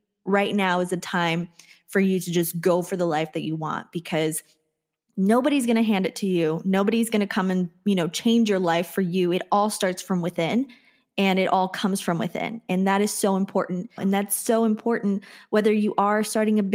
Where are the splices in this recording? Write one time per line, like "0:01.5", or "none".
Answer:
0:14.0